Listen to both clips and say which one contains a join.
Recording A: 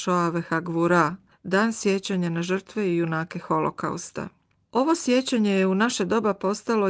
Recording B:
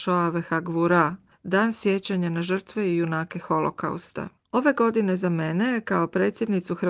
B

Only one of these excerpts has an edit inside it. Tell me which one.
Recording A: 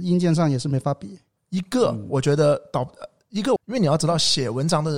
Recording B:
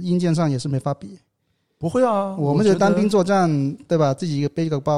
A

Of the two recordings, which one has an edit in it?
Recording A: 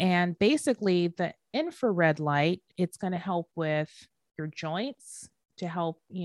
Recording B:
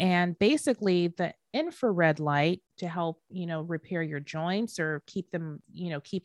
B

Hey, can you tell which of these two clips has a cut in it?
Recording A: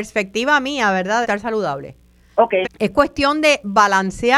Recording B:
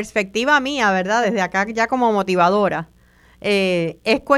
A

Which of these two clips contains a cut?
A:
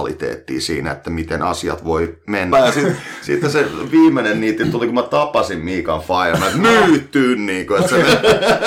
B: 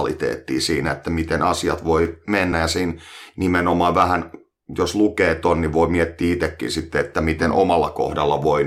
A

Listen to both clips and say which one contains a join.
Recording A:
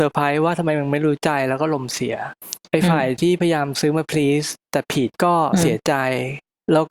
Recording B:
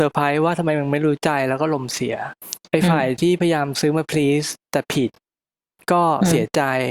A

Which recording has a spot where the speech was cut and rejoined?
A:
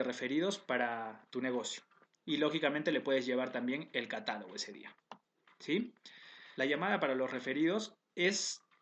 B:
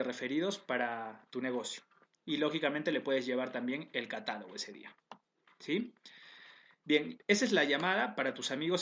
A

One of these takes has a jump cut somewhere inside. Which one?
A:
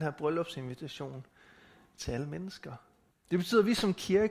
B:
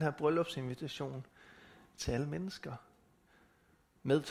A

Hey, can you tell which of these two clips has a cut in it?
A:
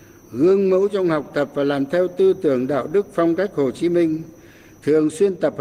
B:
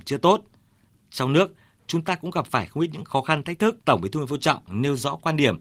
B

